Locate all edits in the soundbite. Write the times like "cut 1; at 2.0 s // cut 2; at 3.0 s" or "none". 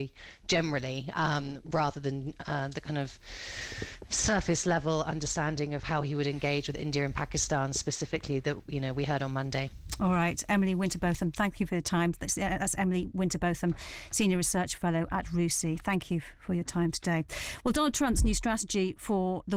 none